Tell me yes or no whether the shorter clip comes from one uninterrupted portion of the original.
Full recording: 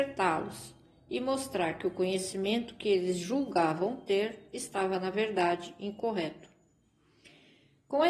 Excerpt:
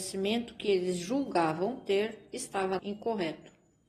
no